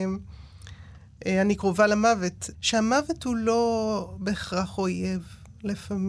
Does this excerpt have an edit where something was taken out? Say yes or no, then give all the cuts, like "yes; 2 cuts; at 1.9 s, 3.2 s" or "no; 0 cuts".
yes; 1 cut; at 2.5 s